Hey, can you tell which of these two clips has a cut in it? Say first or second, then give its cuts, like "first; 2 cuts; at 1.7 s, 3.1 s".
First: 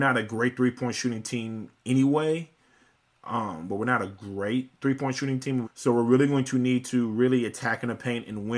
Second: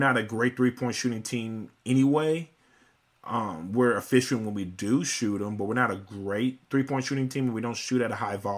first; 2 cuts; at 3.7 s, 5.6 s